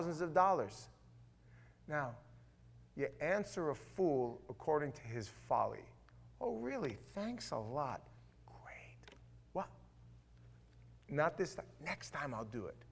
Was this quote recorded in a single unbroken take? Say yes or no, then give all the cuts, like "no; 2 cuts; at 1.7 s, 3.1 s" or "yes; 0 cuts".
yes; 0 cuts